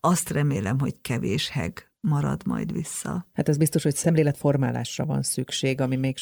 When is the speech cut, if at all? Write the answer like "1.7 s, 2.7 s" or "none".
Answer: 3.3 s